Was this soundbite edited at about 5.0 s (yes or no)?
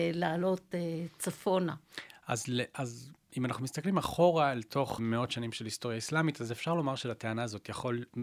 yes